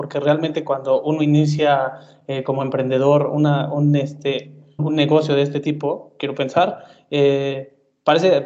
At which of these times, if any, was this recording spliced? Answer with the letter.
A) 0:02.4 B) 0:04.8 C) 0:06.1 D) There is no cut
B